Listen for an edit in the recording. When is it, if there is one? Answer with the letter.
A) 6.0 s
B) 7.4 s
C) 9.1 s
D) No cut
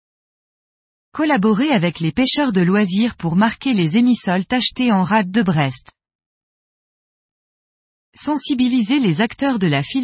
D